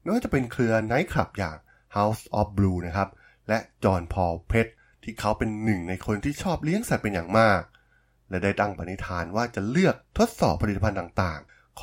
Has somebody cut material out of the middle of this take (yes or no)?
no